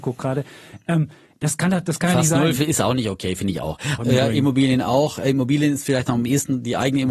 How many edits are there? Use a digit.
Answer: 1